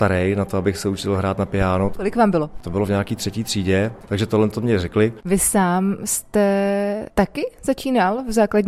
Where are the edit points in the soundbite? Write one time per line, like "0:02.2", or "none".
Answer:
0:05.2